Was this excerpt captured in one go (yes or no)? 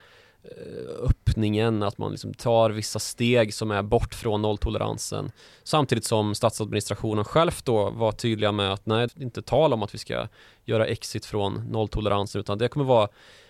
no